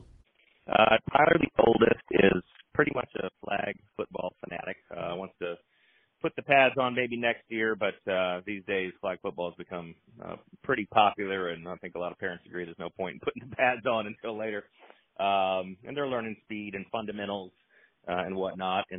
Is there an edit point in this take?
no; 0 cuts

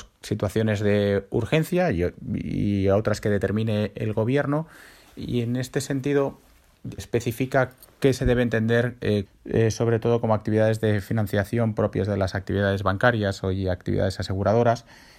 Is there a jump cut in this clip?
yes; 2 cuts; at 7.0 s, 9.3 s

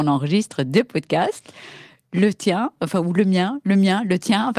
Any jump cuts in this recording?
no; 0 cuts

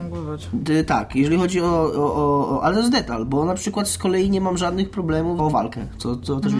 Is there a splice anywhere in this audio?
yes; 1 cut; at 5.4 s

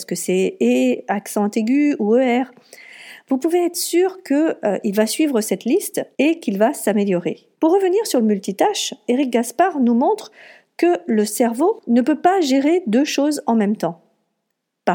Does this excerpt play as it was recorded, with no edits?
no; 3 cuts; at 6.1 s, 7.5 s, 9.1 s

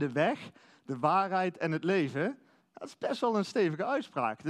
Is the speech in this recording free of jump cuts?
no; 1 cut; at 2.6 s

